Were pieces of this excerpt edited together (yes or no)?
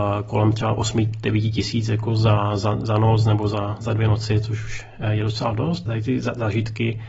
yes